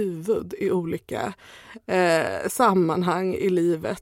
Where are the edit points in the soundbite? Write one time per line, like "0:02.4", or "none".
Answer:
none